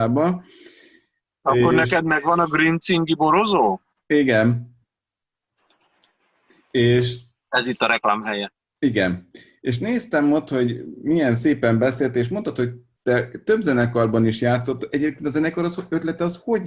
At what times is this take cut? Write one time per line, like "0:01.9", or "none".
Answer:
none